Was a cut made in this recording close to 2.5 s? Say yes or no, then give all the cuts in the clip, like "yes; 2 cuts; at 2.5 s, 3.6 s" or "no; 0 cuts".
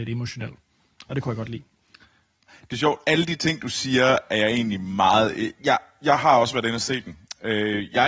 yes; 1 cut; at 2.5 s